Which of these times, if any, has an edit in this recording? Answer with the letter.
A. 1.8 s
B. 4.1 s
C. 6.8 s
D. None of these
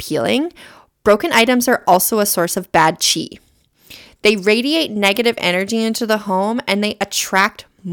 D